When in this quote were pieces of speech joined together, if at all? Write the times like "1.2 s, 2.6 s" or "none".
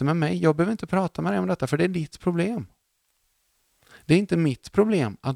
none